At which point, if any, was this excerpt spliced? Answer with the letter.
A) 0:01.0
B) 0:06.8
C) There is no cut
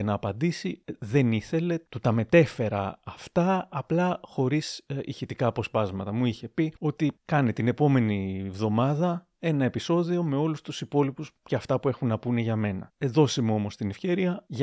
B